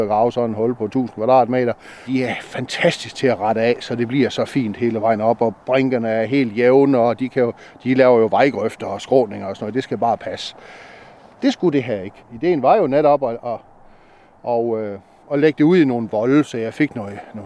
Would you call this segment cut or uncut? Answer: cut